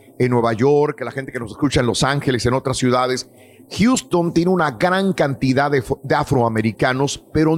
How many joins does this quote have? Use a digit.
0